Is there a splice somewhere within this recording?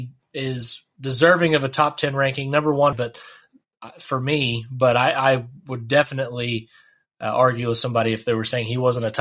yes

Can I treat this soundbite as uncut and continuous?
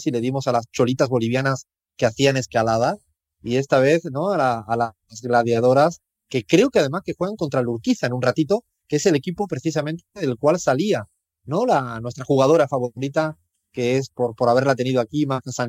yes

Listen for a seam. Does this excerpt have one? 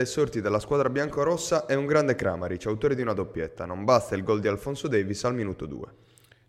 no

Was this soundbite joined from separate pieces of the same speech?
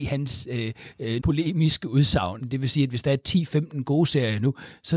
yes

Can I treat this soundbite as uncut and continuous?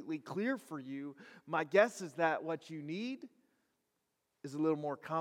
yes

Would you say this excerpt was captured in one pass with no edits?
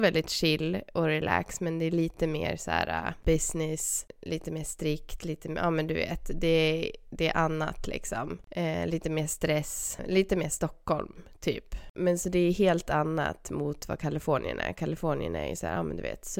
yes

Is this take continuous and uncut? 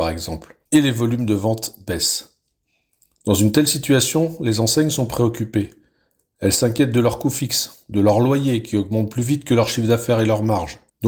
yes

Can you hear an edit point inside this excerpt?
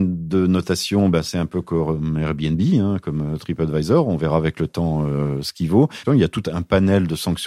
yes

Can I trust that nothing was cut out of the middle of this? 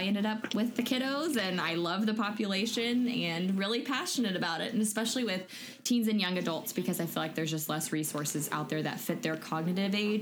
yes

